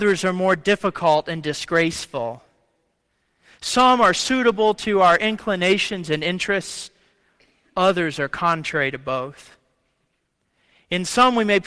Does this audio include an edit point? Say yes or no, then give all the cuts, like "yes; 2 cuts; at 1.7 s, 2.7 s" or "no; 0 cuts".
no; 0 cuts